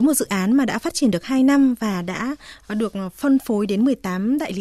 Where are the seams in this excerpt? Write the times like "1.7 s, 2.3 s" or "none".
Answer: none